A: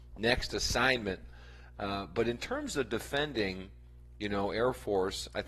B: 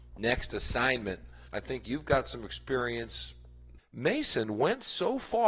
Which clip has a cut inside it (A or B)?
B